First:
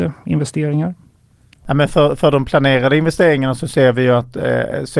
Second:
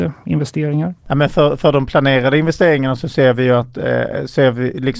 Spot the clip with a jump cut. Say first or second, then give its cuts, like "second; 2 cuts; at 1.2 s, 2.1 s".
second; 1 cut; at 1.0 s